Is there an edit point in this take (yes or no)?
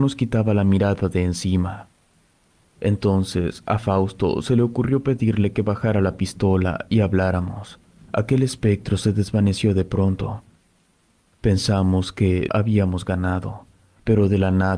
yes